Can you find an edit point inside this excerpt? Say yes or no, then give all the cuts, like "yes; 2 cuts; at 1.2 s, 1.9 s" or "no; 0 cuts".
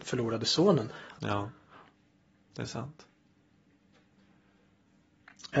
yes; 1 cut; at 1.2 s